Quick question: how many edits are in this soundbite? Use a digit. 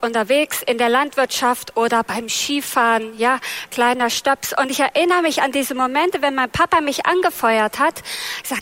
0